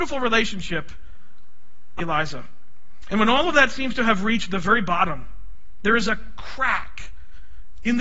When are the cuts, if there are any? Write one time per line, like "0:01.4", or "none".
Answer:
0:02.0
0:03.1